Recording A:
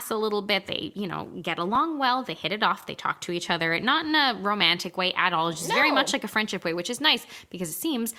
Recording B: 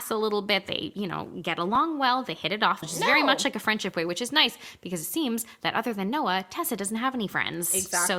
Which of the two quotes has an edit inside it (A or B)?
B